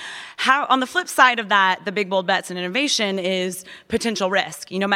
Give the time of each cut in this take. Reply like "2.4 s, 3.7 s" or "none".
none